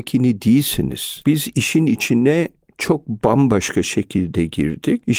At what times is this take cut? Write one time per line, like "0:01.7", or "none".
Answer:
0:01.2